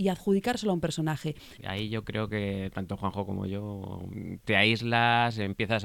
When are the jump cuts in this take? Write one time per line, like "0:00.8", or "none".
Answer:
0:01.6